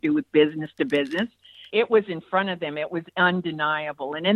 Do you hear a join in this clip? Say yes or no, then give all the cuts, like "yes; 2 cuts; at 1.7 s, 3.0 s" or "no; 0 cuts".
yes; 1 cut; at 1.7 s